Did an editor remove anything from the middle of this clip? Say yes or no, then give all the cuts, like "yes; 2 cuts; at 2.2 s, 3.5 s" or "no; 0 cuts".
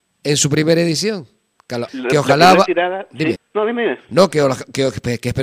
yes; 2 cuts; at 1.9 s, 3.4 s